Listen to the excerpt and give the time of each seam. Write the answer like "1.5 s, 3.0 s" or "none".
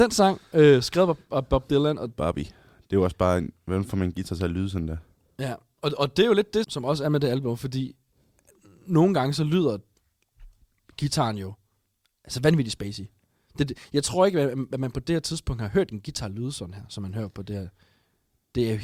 6.6 s